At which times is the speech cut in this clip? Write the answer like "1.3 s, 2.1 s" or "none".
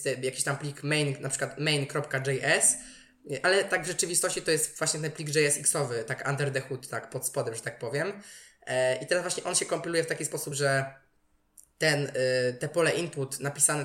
none